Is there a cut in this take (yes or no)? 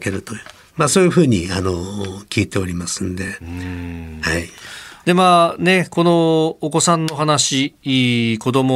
no